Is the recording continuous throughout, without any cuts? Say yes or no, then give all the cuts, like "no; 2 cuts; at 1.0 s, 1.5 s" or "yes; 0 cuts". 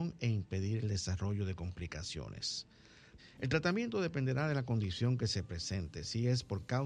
no; 1 cut; at 3.2 s